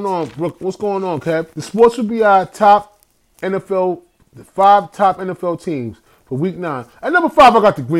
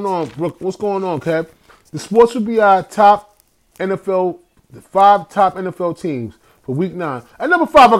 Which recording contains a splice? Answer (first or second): first